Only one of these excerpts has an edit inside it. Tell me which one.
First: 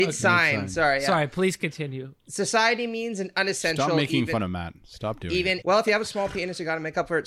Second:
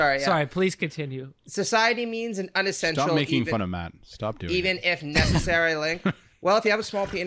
first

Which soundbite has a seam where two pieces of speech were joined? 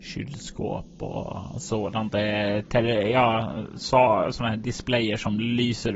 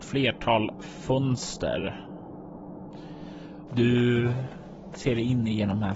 second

